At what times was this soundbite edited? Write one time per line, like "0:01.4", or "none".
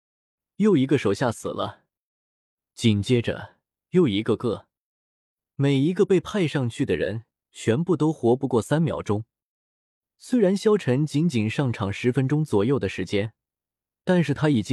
none